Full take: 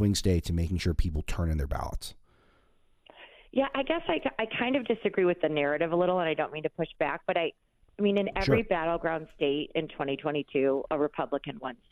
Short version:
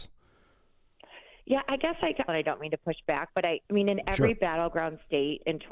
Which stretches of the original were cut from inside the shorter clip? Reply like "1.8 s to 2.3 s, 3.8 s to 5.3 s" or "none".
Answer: 4.3 s to 6.2 s, 7.6 s to 7.9 s